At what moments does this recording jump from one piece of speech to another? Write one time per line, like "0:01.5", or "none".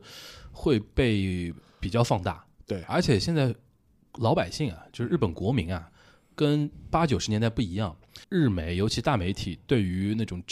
0:08.2